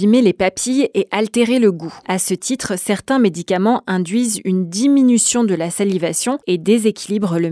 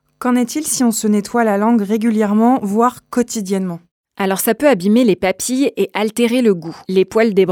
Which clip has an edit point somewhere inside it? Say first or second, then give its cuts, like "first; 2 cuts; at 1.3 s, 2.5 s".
first; 1 cut; at 2.0 s